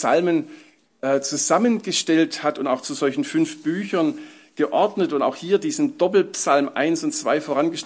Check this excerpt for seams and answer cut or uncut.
uncut